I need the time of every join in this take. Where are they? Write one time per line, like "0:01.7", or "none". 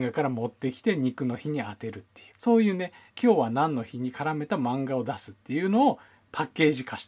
0:02.3